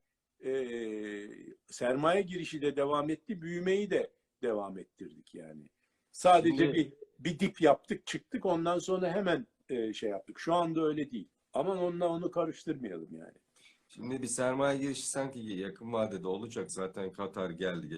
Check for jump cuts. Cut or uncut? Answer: uncut